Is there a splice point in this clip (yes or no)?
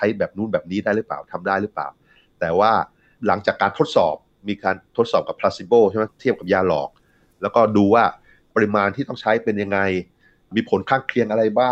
no